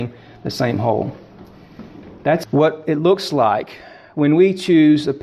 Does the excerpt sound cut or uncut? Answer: cut